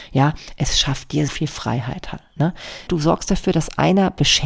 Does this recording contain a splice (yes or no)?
yes